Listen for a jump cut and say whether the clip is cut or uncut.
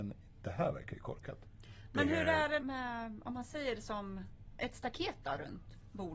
cut